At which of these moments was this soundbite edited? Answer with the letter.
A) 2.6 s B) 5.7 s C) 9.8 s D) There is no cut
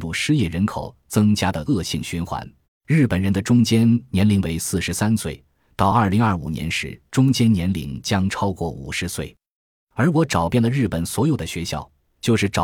A